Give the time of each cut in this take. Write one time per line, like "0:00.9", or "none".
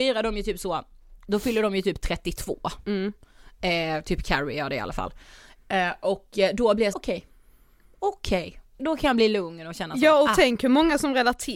0:06.9
0:08.8